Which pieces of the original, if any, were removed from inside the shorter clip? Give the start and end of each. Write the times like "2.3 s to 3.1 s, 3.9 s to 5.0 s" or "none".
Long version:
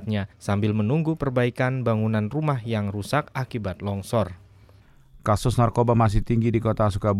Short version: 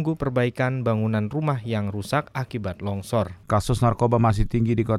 4.4 s to 5.2 s

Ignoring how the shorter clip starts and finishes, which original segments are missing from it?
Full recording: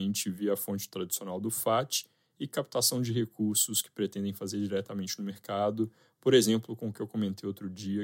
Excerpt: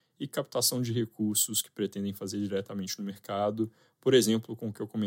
none

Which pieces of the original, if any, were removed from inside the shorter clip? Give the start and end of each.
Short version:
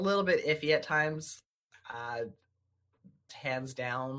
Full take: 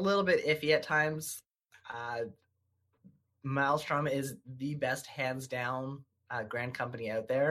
3.3 s to 5.0 s

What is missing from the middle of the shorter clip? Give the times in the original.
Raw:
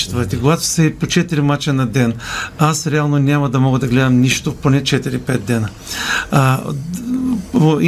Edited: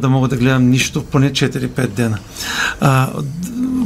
none

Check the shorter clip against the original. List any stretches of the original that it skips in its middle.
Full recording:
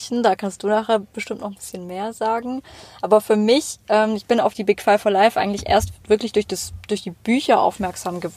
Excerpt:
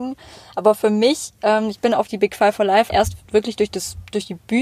5.3 s to 5.6 s

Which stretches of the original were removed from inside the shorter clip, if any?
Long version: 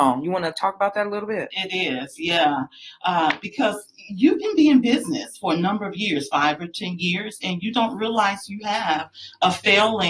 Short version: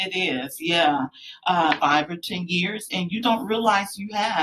3.4 s to 6.3 s

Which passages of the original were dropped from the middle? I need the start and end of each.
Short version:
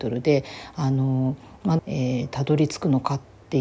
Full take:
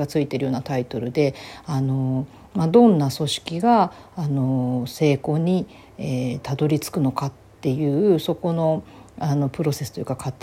2.7 s to 5.9 s

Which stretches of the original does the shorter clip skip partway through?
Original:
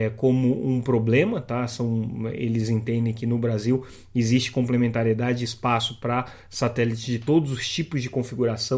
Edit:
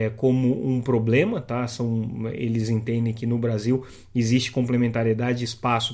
none

